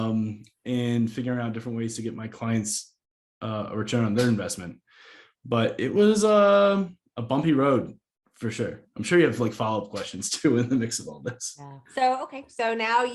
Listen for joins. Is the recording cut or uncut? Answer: cut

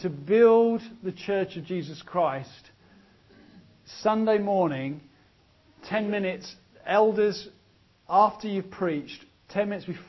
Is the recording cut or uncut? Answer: uncut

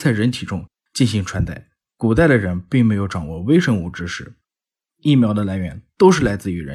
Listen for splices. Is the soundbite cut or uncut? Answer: uncut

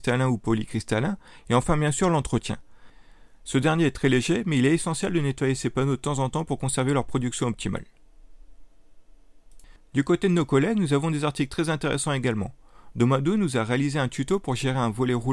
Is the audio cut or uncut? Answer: uncut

